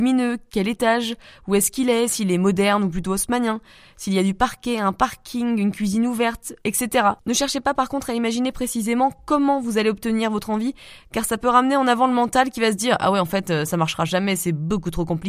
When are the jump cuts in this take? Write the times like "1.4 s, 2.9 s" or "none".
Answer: 7.2 s